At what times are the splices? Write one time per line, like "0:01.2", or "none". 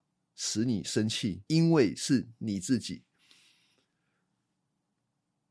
0:01.5